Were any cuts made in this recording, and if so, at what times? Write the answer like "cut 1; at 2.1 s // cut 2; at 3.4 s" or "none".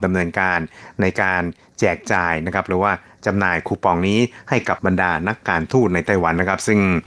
cut 1; at 4.8 s